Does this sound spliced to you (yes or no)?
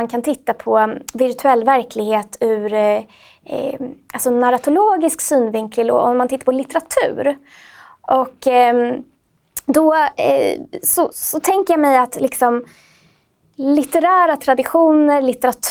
yes